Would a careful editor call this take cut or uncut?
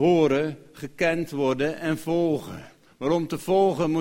uncut